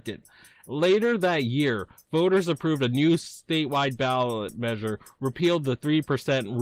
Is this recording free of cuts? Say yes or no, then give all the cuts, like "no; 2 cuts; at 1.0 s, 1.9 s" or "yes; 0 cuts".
yes; 0 cuts